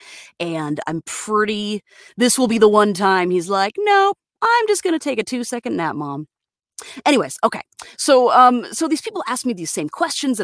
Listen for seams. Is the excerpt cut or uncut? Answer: uncut